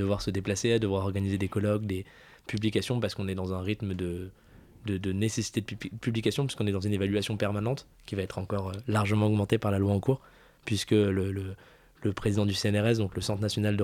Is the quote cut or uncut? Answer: uncut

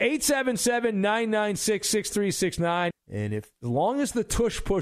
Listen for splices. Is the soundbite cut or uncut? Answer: cut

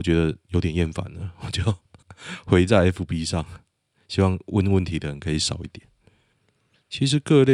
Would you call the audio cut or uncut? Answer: uncut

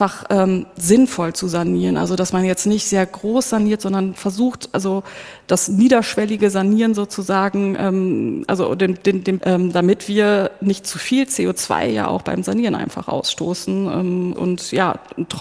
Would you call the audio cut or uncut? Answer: cut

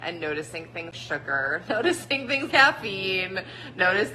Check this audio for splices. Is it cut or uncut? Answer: cut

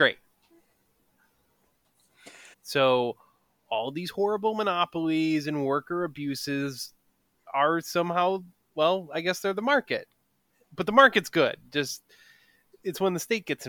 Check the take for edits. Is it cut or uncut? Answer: cut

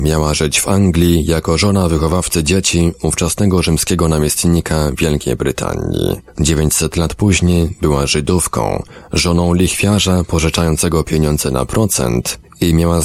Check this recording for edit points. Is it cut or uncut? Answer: uncut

